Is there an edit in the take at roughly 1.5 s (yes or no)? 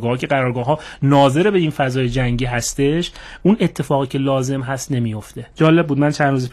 no